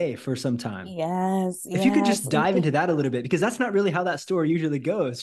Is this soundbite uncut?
yes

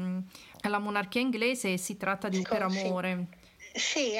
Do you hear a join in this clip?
yes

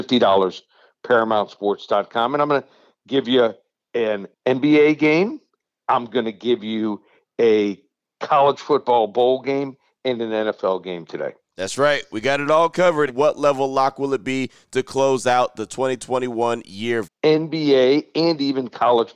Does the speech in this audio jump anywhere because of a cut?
yes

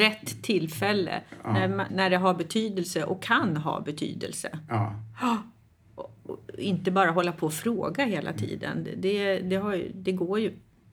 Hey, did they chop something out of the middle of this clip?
yes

